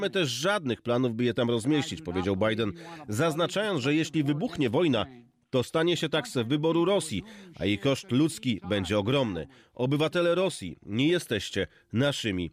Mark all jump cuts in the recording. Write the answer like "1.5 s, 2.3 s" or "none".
none